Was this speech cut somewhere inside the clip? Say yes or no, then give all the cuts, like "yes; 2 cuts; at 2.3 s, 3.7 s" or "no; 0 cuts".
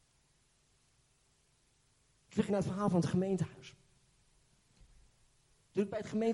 yes; 1 cut; at 2.5 s